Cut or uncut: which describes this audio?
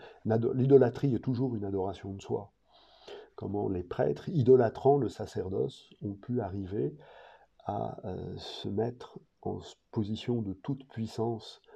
uncut